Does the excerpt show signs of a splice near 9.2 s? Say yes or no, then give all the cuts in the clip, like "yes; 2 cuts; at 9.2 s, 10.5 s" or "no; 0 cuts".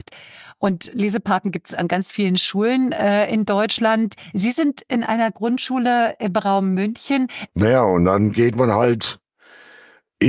no; 1 cut; at 7.5 s